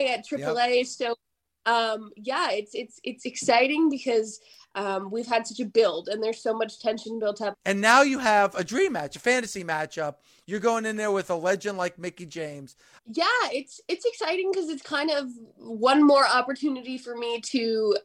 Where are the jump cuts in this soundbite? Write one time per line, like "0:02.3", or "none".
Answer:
0:07.5
0:13.0

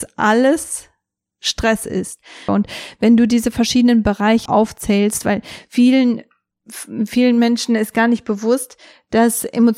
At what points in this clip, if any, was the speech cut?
0:02.5
0:04.5

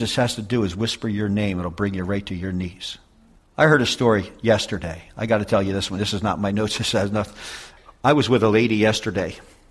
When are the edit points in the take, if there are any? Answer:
none

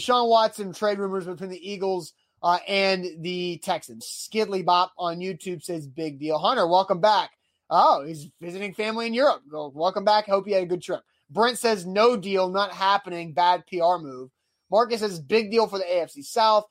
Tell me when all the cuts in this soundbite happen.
0:04.0

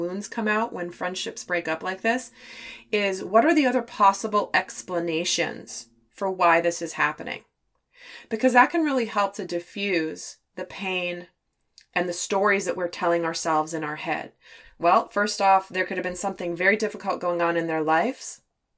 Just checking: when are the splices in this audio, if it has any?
0:14.6

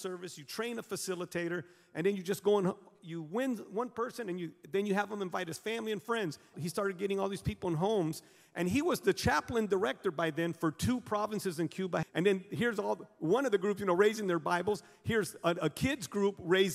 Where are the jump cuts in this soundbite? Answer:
0:06.5
0:12.0

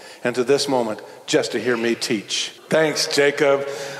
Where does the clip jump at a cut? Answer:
0:02.6

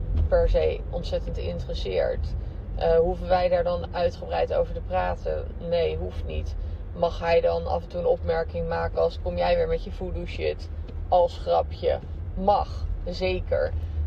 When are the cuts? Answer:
none

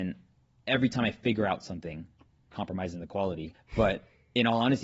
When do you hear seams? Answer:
0:02.5
0:03.5

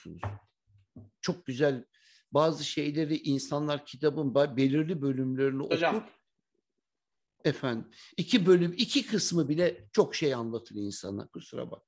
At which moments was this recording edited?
none

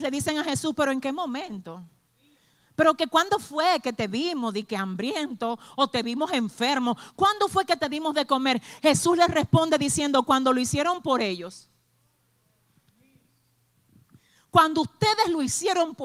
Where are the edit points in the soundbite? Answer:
none

